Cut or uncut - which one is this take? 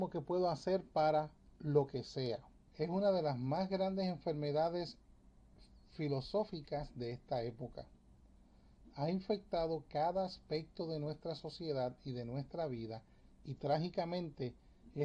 cut